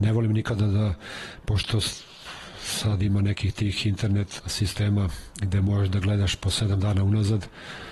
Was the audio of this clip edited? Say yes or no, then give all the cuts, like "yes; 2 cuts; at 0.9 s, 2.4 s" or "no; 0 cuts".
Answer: yes; 1 cut; at 4.4 s